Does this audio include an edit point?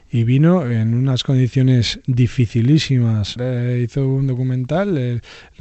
yes; 1 cut; at 3.4 s

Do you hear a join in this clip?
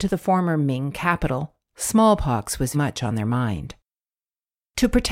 yes; 1 cut; at 2.7 s

